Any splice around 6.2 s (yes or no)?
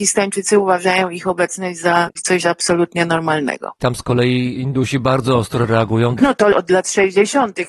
yes